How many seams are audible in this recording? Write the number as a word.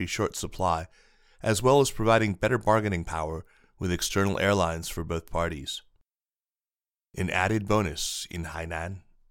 zero